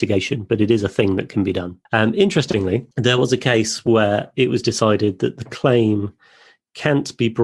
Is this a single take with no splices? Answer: no; 2 cuts; at 1.9 s, 2.9 s

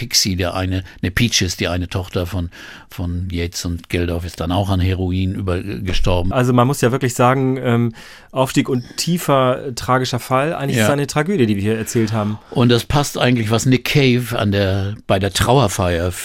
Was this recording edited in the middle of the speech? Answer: yes; 1 cut; at 6.3 s

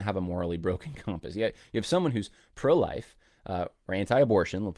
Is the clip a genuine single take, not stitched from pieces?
yes; 0 cuts

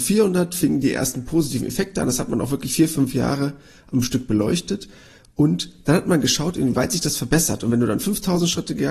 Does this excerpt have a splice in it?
no; 0 cuts

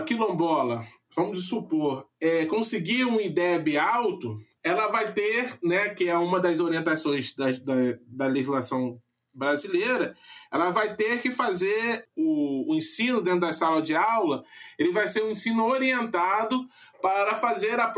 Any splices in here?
no; 0 cuts

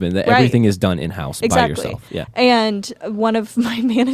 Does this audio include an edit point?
no; 0 cuts

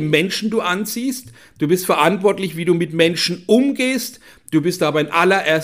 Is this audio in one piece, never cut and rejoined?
yes; 0 cuts

